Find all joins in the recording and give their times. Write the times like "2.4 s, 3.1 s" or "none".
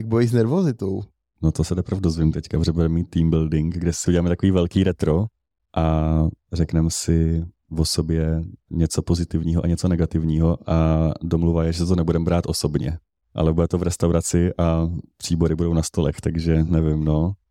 none